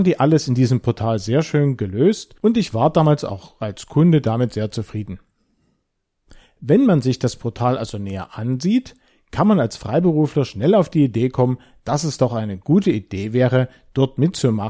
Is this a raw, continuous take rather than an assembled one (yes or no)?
yes